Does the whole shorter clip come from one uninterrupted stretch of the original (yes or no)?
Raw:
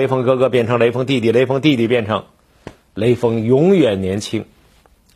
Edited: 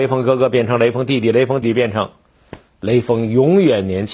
no